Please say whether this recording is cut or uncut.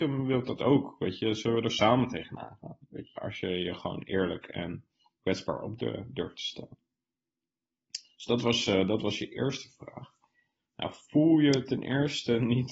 cut